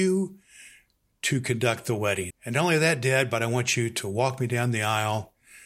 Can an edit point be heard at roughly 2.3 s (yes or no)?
yes